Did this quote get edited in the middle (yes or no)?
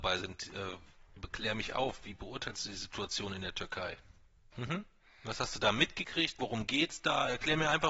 yes